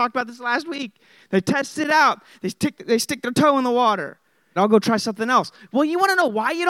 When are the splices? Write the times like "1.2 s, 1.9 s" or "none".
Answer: 4.6 s